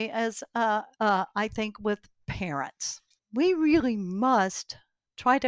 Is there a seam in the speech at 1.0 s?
yes; 2 cuts; at 1.0 s, 3.2 s

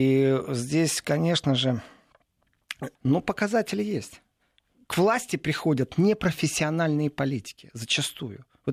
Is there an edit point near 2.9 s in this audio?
yes; 1 cut; at 2.9 s

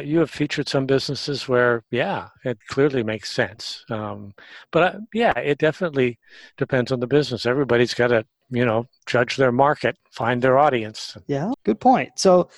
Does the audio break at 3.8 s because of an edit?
no; 1 cut; at 11.5 s

